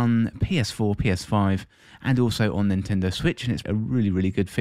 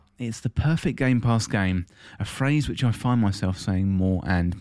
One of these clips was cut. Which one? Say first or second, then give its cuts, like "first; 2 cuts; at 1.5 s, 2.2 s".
first; 1 cut; at 3.6 s